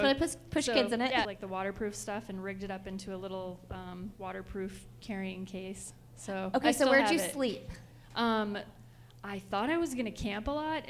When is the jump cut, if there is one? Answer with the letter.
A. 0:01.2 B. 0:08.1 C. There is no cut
A